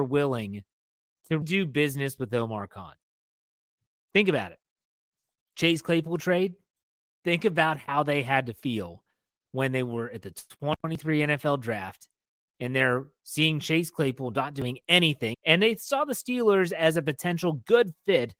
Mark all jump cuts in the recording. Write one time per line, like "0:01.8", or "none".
0:01.4
0:15.3